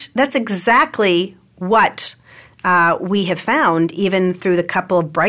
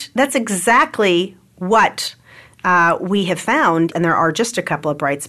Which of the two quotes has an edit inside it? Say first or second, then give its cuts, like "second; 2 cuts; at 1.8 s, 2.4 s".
second; 1 cut; at 3.9 s